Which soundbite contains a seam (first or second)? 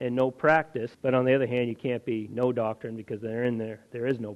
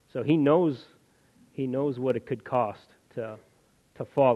first